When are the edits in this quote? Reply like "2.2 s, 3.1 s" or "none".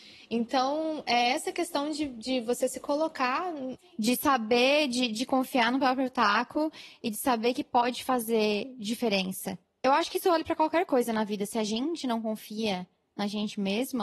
3.8 s